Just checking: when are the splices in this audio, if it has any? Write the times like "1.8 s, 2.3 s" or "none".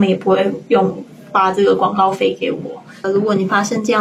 3.0 s